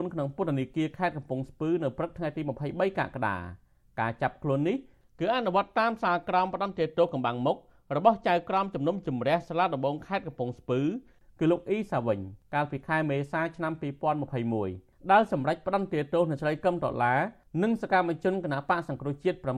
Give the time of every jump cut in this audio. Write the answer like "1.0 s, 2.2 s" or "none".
none